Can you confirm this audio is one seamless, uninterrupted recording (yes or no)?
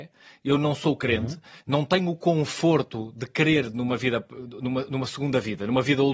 no